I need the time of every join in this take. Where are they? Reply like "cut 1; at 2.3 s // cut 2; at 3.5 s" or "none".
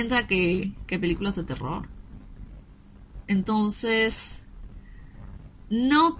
cut 1; at 3.2 s